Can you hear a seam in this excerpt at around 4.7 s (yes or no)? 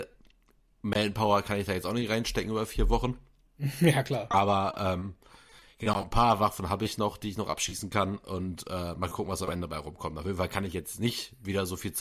no